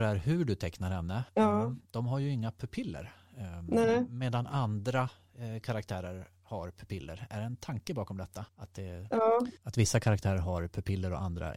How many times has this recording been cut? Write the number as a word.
three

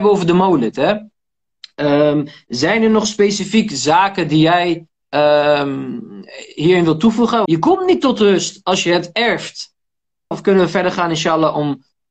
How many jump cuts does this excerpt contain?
two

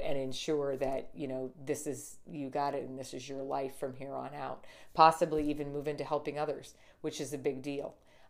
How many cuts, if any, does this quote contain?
zero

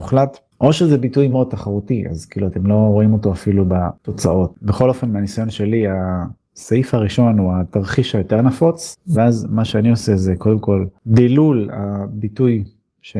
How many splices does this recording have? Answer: two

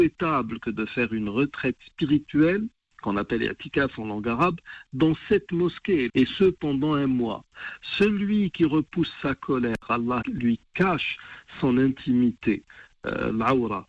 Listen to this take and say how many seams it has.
two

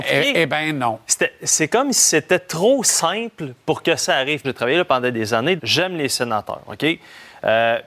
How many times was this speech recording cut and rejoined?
two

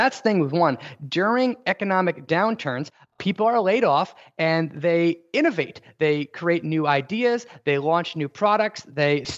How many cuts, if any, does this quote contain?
zero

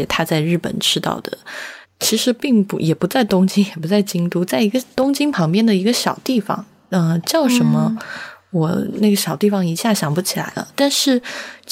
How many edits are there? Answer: one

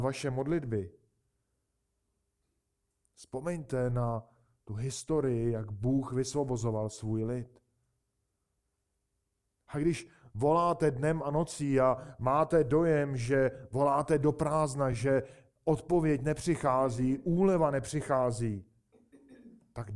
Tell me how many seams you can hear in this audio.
zero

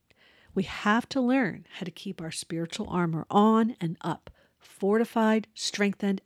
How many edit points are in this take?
zero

